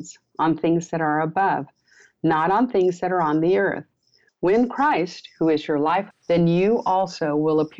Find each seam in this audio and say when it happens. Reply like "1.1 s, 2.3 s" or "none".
4.3 s, 6.1 s